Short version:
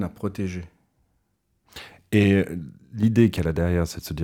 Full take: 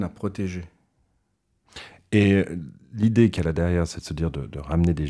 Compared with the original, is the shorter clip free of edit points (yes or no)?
yes